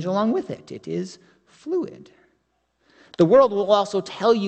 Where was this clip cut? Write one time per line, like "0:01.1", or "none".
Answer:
none